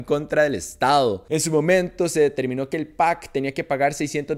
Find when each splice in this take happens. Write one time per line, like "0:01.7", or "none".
none